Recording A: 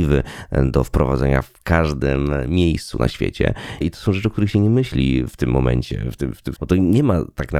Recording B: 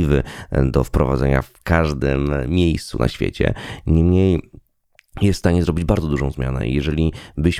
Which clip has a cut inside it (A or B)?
A